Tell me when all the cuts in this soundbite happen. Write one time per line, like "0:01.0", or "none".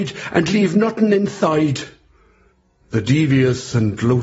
none